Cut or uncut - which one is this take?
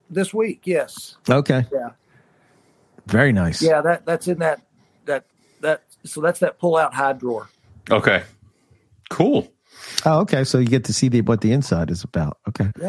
uncut